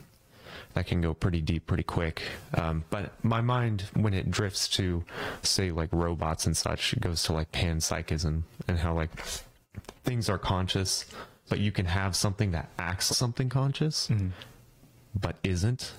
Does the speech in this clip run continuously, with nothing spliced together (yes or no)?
no